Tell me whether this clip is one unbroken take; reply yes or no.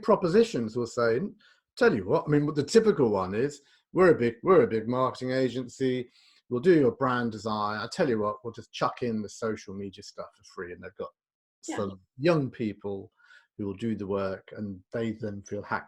yes